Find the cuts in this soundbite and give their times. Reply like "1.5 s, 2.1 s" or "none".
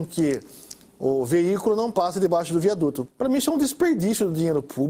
3.1 s